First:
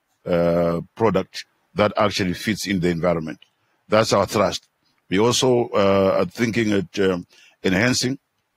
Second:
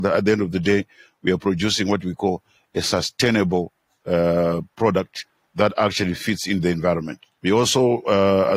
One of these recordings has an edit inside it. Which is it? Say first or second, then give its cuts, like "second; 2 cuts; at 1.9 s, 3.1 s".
second; 1 cut; at 7.4 s